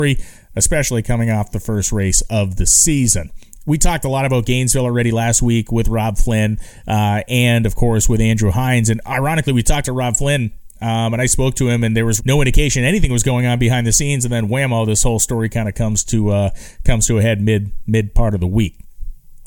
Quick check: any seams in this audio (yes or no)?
yes